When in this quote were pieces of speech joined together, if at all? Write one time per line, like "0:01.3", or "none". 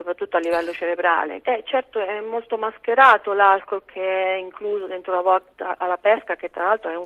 0:01.4